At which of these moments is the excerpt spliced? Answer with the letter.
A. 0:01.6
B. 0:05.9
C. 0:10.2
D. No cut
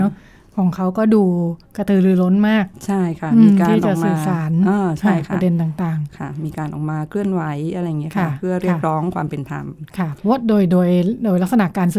A